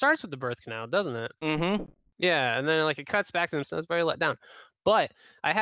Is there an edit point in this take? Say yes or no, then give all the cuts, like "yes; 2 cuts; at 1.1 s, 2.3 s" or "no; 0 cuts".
yes; 1 cut; at 3.6 s